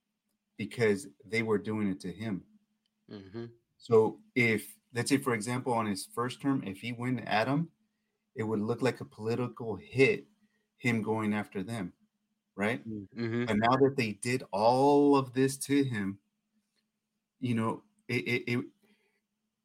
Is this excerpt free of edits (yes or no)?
yes